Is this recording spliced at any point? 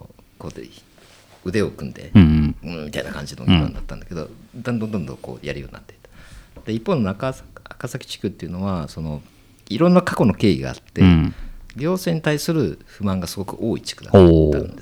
no; 0 cuts

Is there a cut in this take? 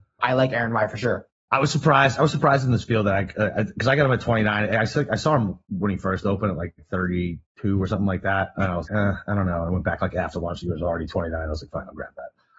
yes; 1 cut; at 8.8 s

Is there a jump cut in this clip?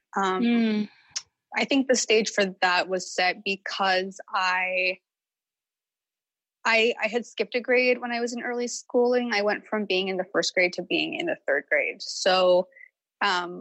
no; 0 cuts

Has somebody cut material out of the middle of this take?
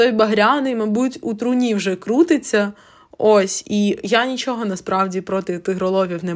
no; 0 cuts

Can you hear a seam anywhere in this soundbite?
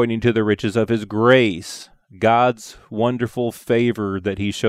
no; 0 cuts

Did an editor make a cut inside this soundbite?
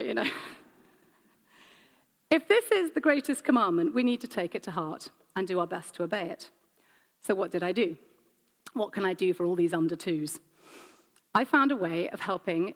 no; 0 cuts

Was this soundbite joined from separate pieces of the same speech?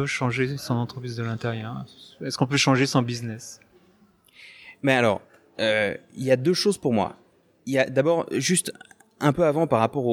no; 0 cuts

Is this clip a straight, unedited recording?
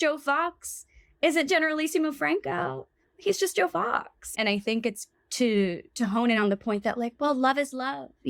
no; 1 cut; at 4.3 s

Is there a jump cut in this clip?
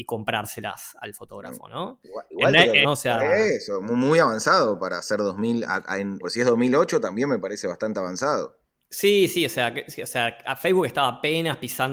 yes; 2 cuts; at 2.8 s, 6.2 s

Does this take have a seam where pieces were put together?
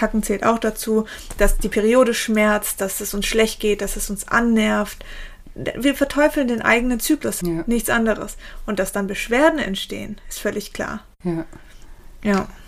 yes; 1 cut; at 7.4 s

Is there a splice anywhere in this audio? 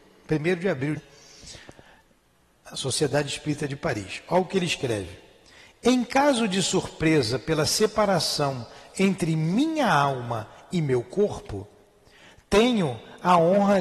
yes; 1 cut; at 1.0 s

